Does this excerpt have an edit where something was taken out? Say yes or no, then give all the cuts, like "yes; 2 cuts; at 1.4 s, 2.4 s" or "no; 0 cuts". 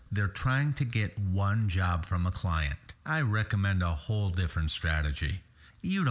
no; 0 cuts